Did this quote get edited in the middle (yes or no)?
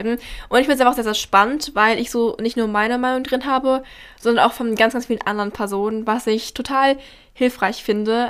no